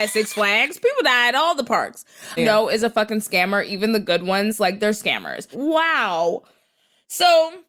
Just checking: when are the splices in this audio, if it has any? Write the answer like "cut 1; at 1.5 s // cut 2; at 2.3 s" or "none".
cut 1; at 2.4 s // cut 2; at 5.5 s